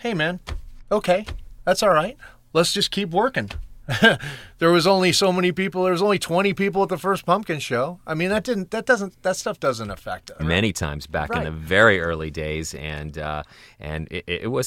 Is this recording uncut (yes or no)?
no